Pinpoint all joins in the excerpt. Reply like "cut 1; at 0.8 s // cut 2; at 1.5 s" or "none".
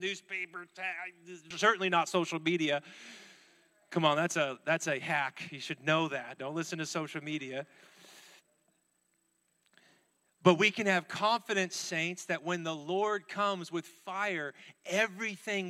cut 1; at 1.5 s